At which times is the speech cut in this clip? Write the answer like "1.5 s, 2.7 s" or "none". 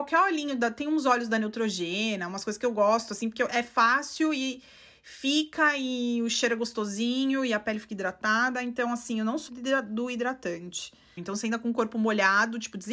9.5 s, 11.2 s